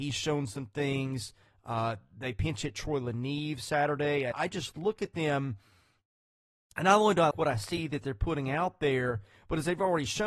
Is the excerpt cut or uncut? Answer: cut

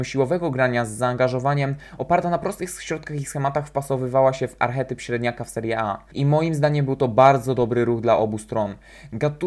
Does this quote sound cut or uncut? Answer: cut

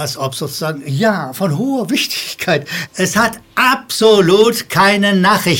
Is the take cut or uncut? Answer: cut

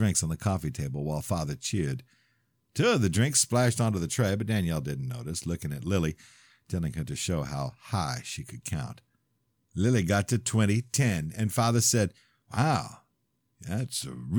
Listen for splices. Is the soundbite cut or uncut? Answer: uncut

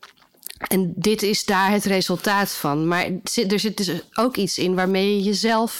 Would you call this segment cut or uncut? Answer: uncut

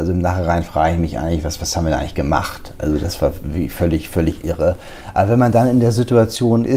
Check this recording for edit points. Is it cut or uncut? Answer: uncut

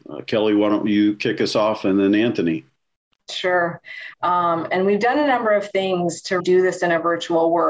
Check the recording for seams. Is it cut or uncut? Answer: cut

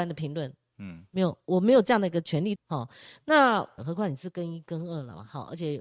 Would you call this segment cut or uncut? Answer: cut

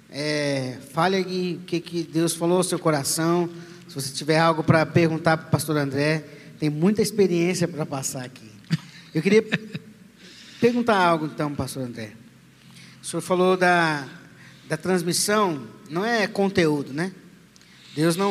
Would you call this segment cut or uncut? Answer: uncut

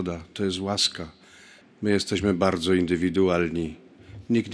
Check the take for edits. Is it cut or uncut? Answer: cut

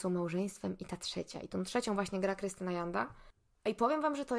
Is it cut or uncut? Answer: uncut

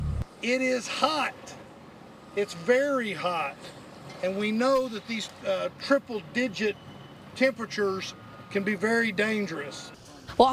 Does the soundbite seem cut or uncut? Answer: uncut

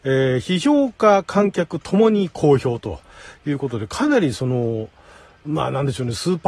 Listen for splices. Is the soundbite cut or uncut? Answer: uncut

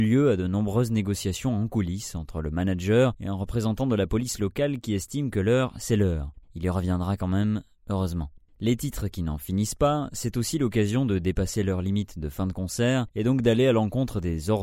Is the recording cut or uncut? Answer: cut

